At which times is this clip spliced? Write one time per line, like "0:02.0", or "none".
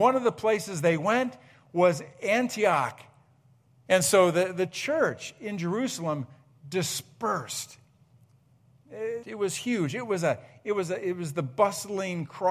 0:03.9
0:09.2